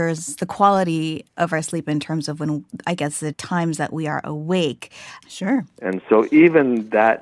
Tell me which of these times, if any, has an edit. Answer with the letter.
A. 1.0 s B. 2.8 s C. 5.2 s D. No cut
C